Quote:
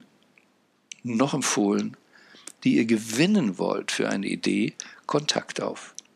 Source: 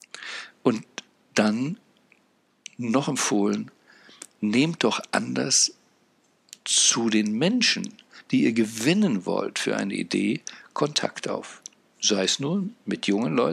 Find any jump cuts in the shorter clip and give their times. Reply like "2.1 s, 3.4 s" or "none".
2.6 s